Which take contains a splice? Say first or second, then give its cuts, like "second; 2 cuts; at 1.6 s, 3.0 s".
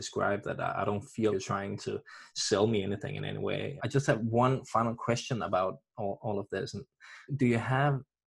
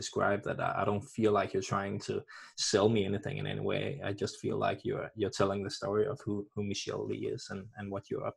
first; 3 cuts; at 1.3 s, 3.8 s, 7.3 s